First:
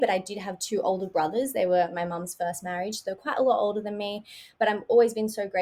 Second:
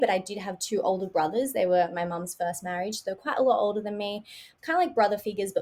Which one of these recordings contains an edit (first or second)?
second